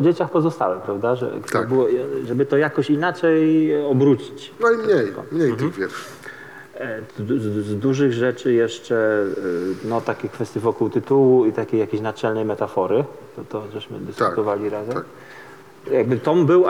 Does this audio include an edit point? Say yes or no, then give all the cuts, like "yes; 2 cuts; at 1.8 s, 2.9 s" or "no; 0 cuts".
yes; 1 cut; at 7.1 s